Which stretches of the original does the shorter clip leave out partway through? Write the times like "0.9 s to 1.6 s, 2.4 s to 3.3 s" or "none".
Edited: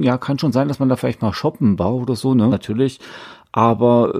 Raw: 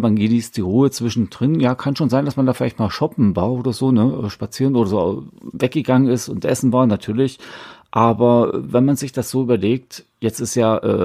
4.1 s to 6.9 s